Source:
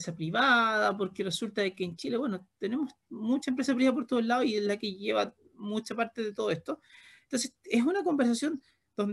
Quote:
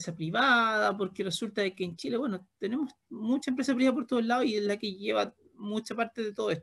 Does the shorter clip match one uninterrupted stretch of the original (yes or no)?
yes